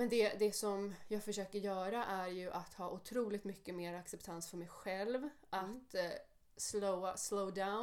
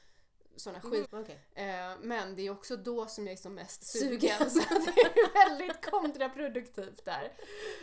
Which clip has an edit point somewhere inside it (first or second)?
second